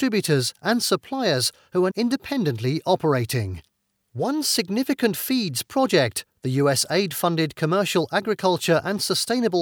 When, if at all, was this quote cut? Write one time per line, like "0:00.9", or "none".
0:01.9